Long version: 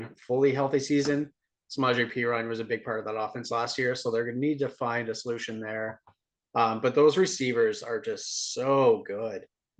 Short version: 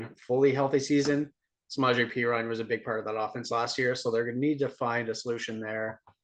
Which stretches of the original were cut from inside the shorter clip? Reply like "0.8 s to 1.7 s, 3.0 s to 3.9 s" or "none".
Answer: none